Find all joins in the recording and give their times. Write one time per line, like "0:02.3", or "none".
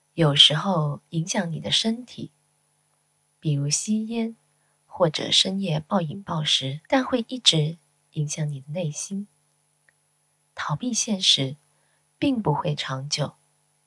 0:06.9
0:10.4